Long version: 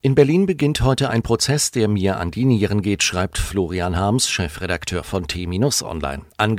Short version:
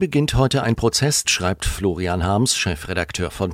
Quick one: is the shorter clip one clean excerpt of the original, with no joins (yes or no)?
no